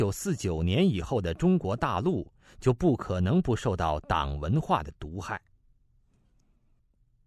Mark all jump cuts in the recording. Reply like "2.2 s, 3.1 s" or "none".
none